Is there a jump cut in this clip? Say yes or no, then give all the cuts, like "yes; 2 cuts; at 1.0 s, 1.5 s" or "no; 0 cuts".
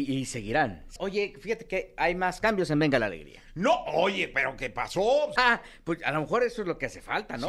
yes; 2 cuts; at 1.0 s, 5.4 s